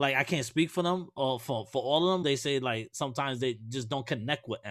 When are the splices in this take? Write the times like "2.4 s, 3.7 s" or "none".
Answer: 2.2 s